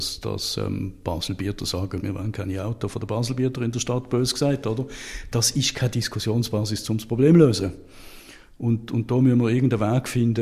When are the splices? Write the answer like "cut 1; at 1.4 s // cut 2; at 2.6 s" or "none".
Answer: cut 1; at 2.0 s